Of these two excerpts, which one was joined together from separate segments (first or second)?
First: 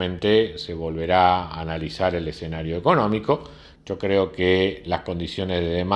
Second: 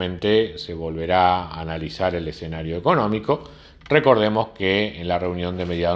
first